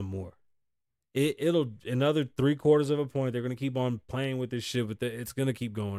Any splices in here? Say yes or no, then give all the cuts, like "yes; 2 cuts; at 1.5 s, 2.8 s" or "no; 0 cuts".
no; 0 cuts